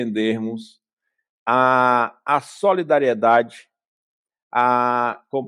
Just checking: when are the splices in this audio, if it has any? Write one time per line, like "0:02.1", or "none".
none